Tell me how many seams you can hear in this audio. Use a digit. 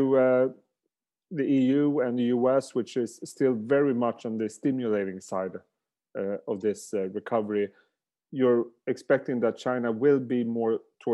0